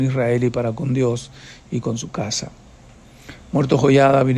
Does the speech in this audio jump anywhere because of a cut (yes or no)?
no